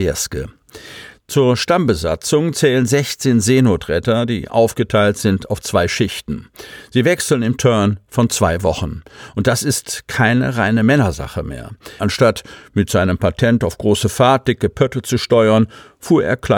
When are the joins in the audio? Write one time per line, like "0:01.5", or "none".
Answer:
0:01.2
0:12.0